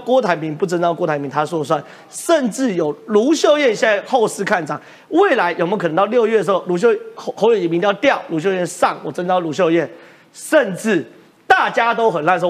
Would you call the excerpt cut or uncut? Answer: uncut